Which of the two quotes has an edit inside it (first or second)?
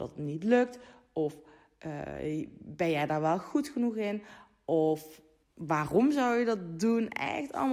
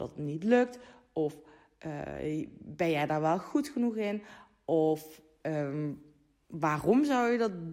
first